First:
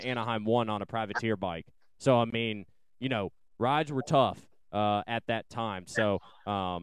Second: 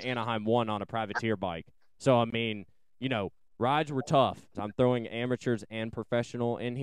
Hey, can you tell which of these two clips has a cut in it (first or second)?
second